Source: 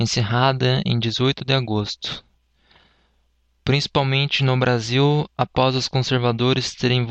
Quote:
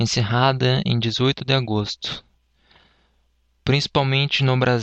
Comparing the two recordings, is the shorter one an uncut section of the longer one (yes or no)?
yes